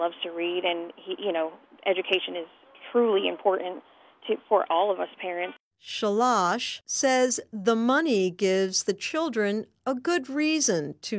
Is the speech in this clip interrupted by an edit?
no; 0 cuts

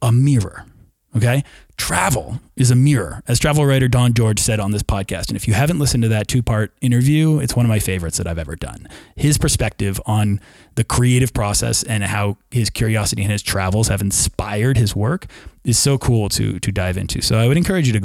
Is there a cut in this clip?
no; 0 cuts

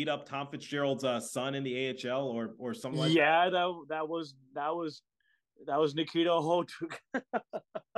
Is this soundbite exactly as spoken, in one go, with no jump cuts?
yes; 0 cuts

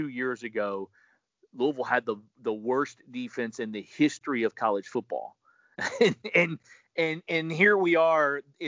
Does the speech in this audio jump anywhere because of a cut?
no; 0 cuts

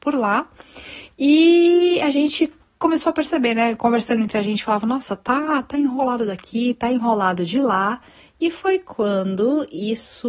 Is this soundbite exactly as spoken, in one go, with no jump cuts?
yes; 0 cuts

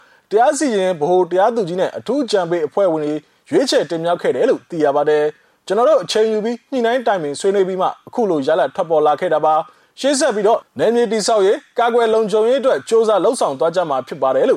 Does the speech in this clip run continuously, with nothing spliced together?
no; 1 cut; at 10.7 s

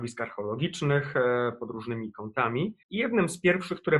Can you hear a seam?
yes; 1 cut; at 2.8 s

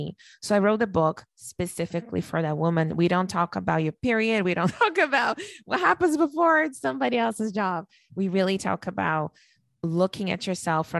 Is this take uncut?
yes; 0 cuts

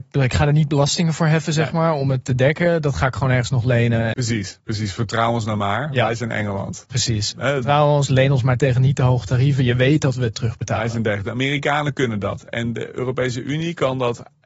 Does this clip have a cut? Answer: yes; 1 cut; at 4.1 s

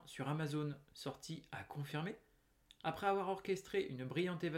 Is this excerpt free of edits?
yes; 0 cuts

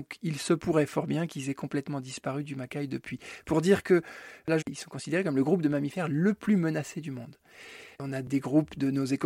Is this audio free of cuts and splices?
no; 2 cuts; at 4.6 s, 7.9 s

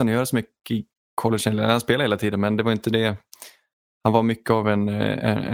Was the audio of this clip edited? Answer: no; 0 cuts

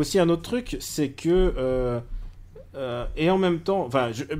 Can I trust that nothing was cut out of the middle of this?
yes; 0 cuts

